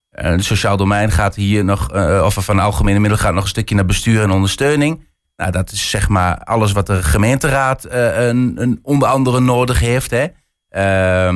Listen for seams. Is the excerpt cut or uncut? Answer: uncut